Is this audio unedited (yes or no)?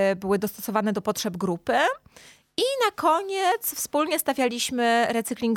yes